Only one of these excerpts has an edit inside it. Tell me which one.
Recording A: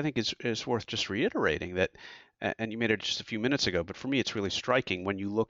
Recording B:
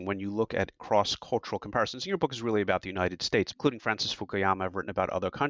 B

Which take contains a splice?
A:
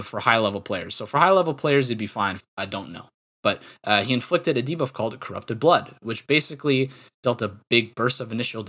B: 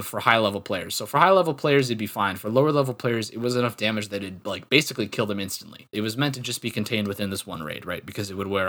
A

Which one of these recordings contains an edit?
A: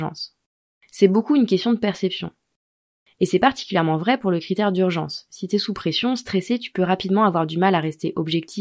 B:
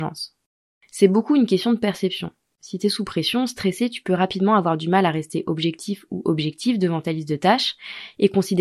B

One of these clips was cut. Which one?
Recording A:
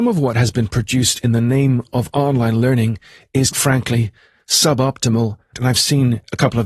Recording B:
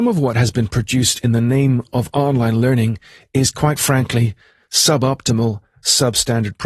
A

